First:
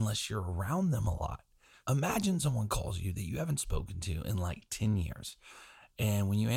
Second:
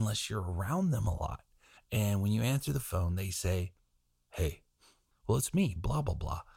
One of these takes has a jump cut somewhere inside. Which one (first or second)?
second